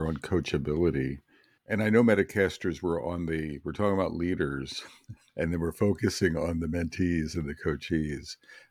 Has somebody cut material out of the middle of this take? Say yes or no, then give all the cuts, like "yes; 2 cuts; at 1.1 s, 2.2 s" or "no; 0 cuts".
yes; 2 cuts; at 1.6 s, 5.3 s